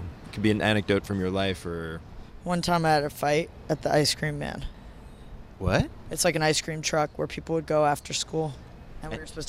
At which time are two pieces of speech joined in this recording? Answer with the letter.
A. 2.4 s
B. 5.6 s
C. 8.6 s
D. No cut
D